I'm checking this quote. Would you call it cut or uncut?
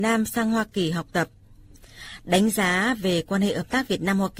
uncut